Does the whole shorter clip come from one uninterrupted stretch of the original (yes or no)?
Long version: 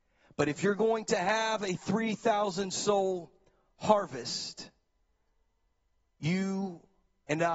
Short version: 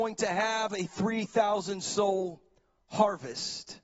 yes